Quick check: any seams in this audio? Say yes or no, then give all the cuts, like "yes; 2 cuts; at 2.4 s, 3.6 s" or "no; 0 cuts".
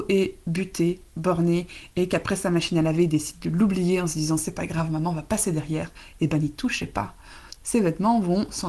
yes; 1 cut; at 7.6 s